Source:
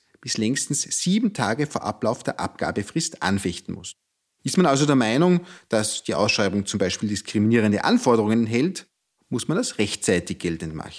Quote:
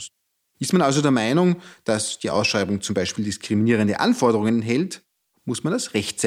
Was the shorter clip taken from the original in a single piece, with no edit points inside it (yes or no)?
yes